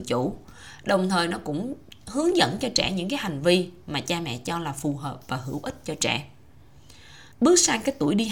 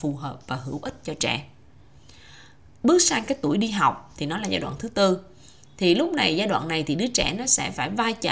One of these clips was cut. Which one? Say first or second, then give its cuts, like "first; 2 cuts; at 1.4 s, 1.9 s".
first; 1 cut; at 7.3 s